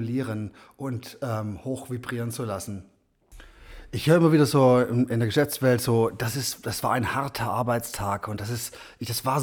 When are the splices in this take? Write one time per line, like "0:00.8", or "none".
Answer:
none